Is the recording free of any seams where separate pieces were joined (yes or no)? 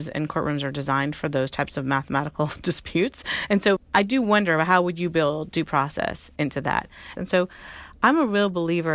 no